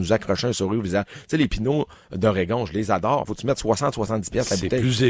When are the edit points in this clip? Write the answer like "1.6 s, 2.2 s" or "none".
3.2 s